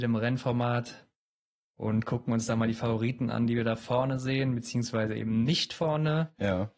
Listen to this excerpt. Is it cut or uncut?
uncut